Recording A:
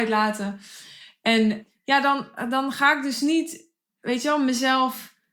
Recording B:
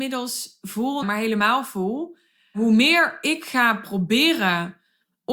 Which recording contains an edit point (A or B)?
B